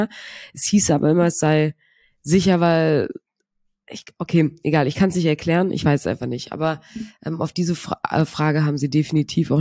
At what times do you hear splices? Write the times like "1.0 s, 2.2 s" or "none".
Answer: none